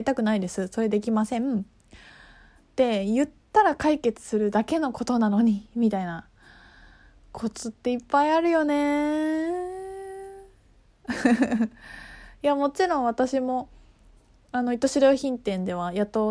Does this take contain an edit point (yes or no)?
no